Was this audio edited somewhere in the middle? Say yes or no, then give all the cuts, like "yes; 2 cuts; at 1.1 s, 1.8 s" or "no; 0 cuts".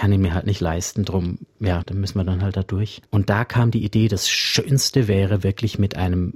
yes; 2 cuts; at 1.8 s, 3.0 s